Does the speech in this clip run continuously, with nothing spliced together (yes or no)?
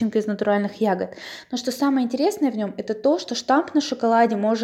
yes